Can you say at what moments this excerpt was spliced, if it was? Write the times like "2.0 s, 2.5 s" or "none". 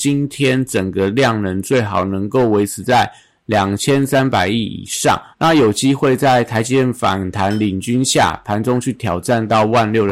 5.3 s